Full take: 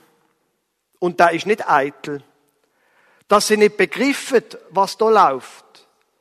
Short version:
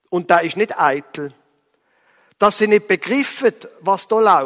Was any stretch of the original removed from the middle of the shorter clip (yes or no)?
no